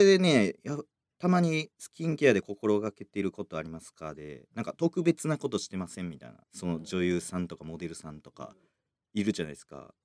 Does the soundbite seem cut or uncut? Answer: cut